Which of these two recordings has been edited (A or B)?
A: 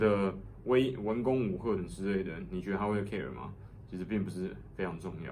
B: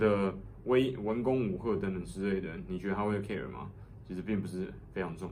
A